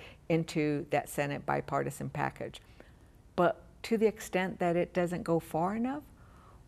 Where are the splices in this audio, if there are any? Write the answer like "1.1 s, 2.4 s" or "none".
none